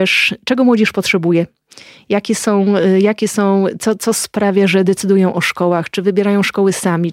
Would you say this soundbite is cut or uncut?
uncut